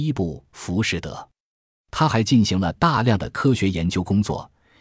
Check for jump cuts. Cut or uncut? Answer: uncut